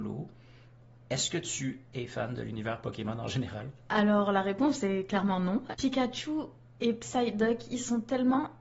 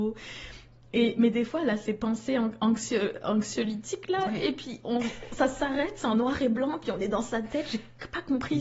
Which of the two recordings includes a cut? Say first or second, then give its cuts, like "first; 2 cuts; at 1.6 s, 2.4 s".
first; 1 cut; at 5.7 s